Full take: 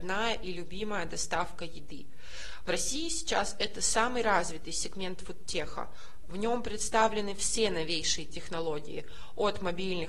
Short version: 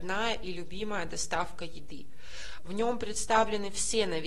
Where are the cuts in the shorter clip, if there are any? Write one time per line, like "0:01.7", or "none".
0:02.6

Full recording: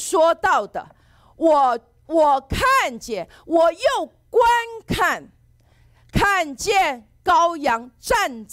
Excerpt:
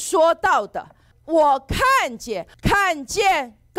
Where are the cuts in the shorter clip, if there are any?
0:01.1
0:02.5

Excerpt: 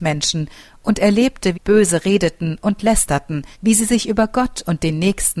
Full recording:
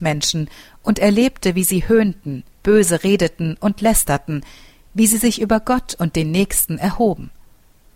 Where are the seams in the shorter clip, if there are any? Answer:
0:01.5
0:03.5

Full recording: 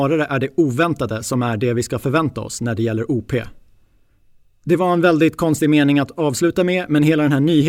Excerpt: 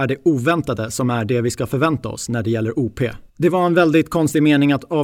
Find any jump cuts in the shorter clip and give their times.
0:03.3

